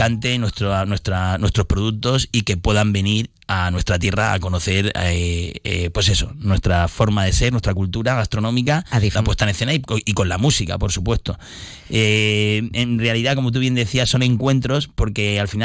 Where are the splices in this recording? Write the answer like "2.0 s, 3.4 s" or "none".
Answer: 9.2 s